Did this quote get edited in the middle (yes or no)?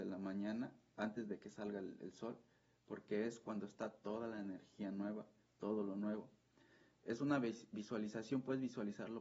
no